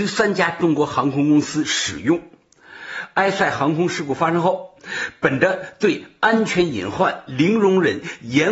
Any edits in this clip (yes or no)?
no